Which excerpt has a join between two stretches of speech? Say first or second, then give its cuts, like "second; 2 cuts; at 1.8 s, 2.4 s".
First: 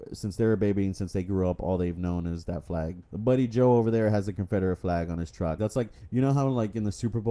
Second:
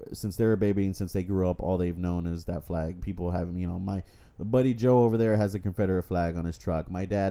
first; 2 cuts; at 3.0 s, 5.6 s